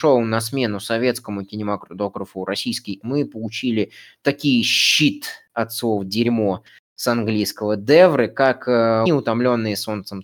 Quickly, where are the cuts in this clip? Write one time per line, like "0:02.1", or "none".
0:03.0
0:09.1